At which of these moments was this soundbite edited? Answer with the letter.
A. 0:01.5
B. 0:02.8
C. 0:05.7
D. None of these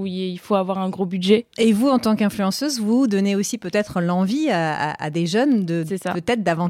A